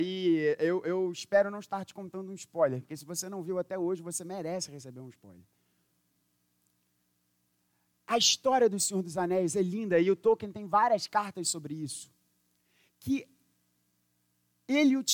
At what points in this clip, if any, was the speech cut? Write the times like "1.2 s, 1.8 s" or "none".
none